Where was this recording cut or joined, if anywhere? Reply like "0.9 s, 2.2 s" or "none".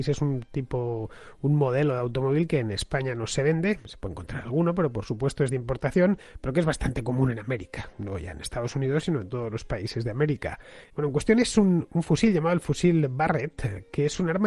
10.9 s